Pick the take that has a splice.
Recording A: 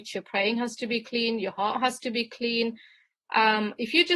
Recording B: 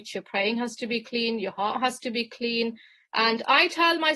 B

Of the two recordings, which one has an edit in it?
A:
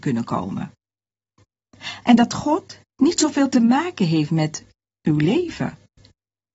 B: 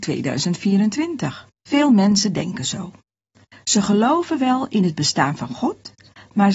B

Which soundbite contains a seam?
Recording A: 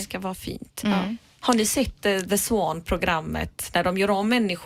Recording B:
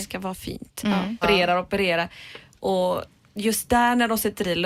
B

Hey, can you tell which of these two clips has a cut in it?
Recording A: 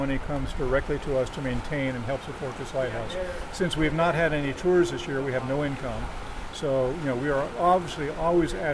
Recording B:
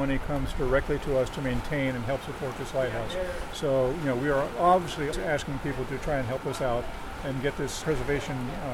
B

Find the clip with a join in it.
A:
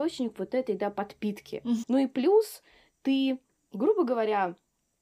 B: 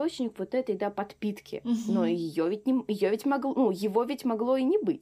A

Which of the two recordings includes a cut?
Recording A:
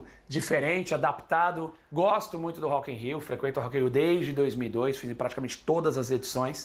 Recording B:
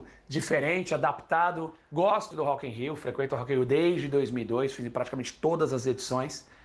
B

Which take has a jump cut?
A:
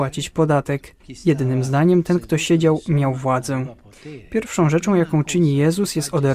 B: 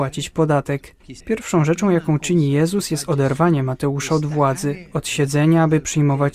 B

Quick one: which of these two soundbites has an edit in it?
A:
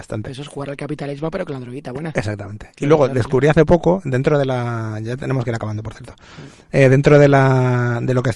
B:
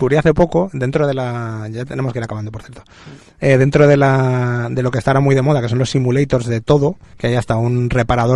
B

